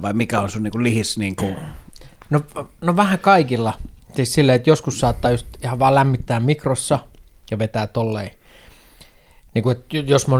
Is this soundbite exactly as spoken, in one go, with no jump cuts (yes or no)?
yes